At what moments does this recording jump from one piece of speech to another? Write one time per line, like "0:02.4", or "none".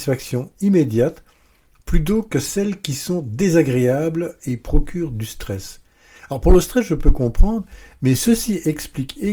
none